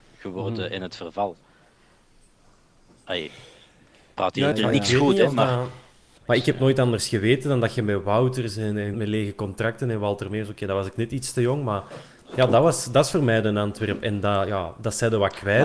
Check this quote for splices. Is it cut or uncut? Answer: cut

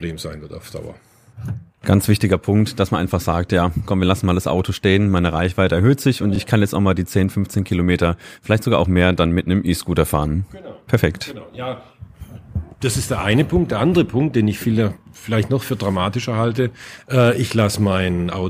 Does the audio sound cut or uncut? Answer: uncut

